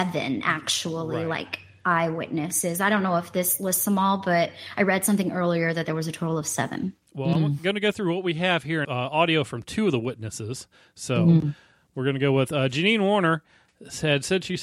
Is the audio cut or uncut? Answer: cut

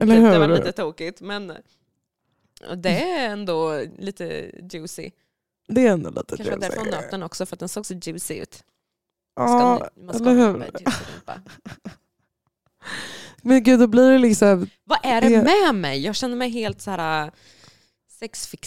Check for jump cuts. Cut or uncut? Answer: uncut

